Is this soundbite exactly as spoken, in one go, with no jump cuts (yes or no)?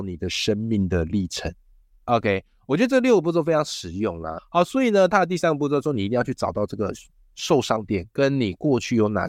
no